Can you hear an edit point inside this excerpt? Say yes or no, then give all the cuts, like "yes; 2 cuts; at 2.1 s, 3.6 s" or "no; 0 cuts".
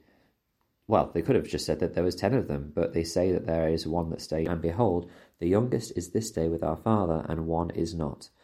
yes; 1 cut; at 4.4 s